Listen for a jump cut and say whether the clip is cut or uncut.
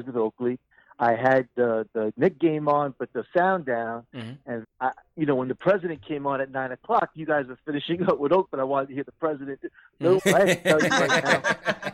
cut